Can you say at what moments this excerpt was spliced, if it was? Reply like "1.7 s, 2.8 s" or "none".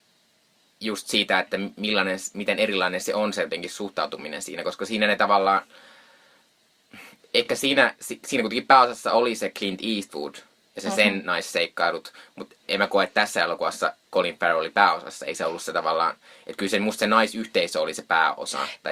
none